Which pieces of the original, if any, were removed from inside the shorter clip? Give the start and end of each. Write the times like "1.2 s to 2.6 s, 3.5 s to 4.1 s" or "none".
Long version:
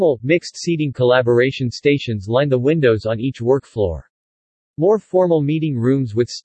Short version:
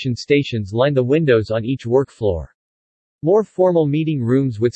none